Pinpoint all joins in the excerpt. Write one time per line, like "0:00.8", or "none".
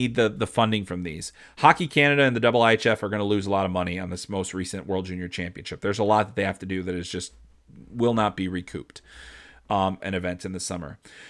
0:10.0